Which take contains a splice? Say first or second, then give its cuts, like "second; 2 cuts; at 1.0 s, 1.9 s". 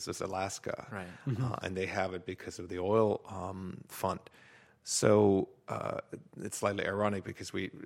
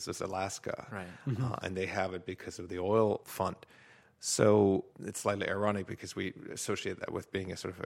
second; 2 cuts; at 3.2 s, 4.9 s